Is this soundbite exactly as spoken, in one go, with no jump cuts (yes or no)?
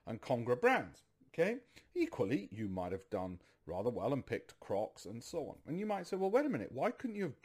yes